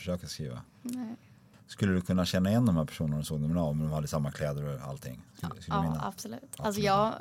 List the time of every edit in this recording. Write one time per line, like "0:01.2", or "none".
none